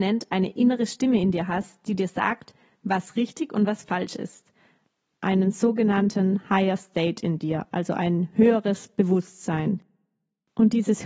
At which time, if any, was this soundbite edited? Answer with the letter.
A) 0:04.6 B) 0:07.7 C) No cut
C